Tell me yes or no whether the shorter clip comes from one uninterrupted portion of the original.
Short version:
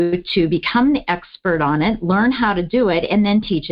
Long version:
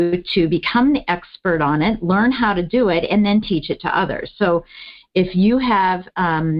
yes